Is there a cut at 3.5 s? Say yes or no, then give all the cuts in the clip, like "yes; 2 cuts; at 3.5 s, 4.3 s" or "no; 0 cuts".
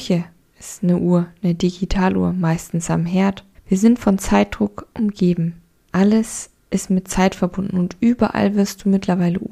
yes; 2 cuts; at 3.5 s, 5.8 s